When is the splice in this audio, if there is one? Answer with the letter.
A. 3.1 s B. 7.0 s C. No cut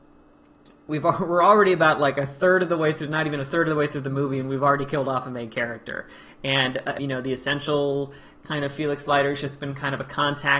B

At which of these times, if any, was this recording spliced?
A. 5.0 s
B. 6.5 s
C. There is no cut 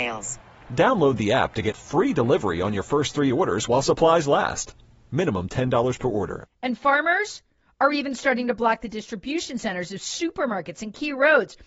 B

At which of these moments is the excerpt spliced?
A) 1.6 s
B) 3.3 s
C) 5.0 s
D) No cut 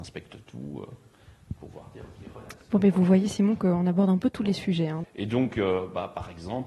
C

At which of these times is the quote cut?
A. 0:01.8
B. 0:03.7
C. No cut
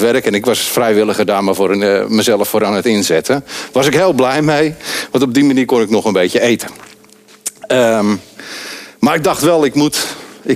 C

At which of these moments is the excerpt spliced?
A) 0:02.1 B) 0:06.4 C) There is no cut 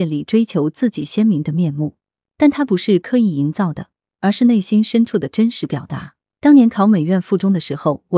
B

